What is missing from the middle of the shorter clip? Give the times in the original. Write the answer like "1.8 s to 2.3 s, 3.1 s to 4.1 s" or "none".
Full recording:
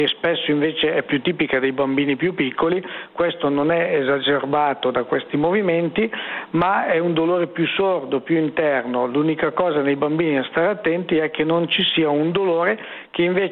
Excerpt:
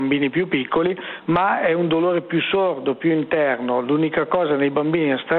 3.1 s to 6.5 s